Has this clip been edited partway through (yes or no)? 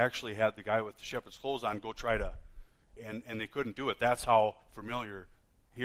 yes